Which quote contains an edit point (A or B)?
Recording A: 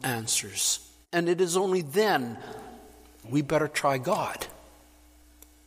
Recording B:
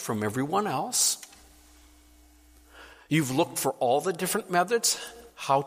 A